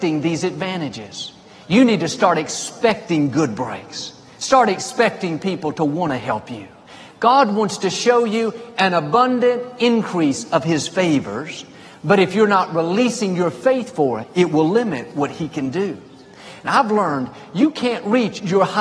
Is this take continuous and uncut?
no; 1 cut; at 14.2 s

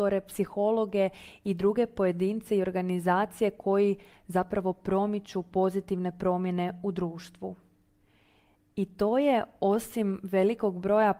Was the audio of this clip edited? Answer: no; 0 cuts

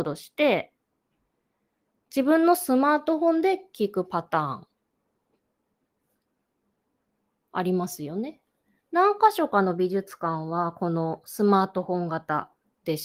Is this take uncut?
yes; 0 cuts

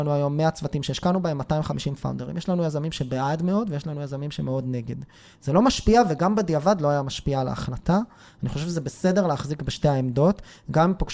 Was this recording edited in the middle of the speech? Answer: no; 0 cuts

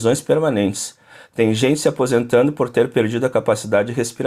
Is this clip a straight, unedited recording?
yes; 0 cuts

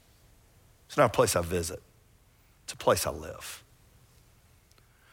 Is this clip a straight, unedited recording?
yes; 0 cuts

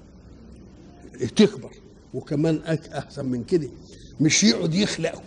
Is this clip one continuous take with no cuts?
yes; 0 cuts

